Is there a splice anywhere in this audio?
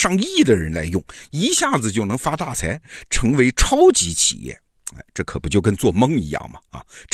no; 0 cuts

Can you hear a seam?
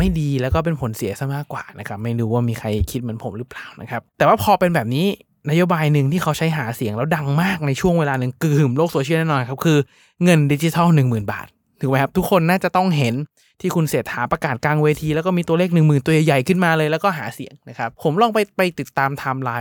yes; 2 cuts; at 4.1 s, 17.9 s

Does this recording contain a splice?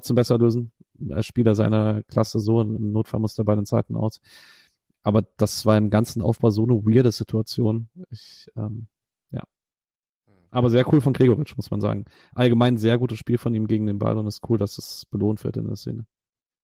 no; 0 cuts

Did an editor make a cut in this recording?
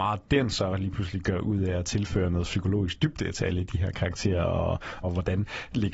yes; 1 cut; at 5.0 s

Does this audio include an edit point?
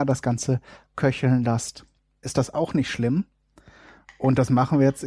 yes; 1 cut; at 2.2 s

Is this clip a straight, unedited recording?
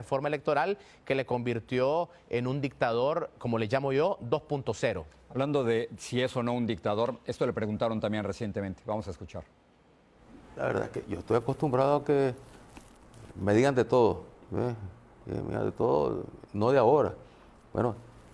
yes; 0 cuts

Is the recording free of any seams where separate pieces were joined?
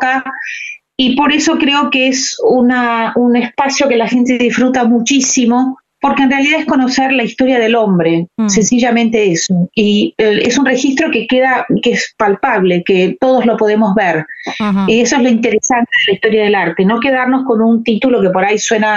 yes; 0 cuts

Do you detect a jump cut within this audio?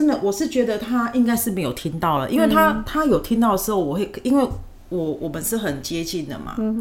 no; 0 cuts

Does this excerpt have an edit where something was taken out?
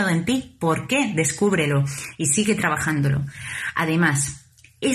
no; 0 cuts

